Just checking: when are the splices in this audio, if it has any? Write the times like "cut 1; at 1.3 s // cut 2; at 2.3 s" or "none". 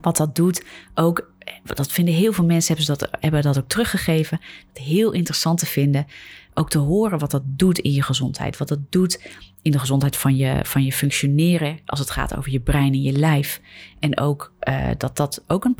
none